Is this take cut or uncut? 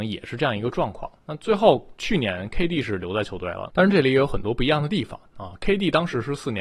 uncut